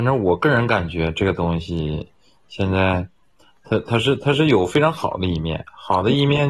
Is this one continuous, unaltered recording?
yes; 0 cuts

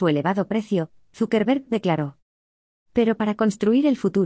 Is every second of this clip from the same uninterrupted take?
yes; 0 cuts

